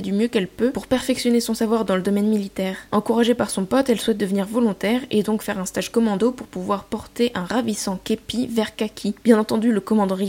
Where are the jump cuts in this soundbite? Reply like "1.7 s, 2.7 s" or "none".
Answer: none